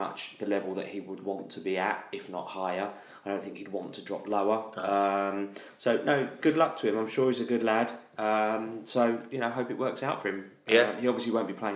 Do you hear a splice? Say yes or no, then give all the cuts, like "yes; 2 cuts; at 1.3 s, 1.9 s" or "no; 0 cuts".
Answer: yes; 1 cut; at 6.4 s